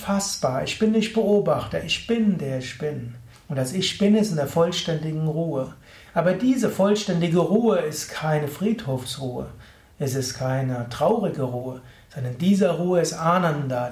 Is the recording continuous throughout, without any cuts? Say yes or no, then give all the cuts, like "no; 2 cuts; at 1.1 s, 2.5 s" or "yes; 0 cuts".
no; 1 cut; at 3.3 s